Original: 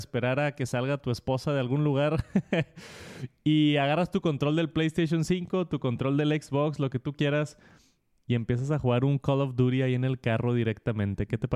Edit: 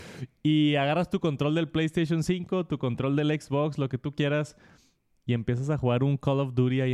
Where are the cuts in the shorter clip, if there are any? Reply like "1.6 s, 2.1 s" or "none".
none